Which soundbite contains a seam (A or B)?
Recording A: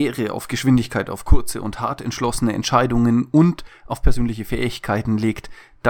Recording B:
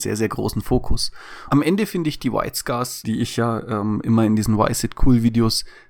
B